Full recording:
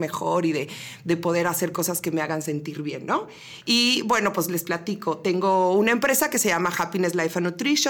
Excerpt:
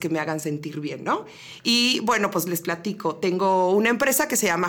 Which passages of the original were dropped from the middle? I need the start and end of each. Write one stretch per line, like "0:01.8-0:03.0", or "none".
none